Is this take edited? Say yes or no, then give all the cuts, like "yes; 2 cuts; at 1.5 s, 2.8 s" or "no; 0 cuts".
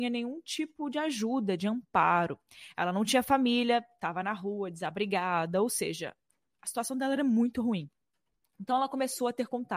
no; 0 cuts